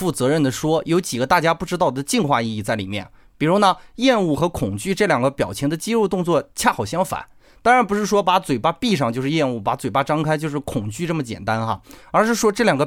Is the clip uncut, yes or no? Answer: yes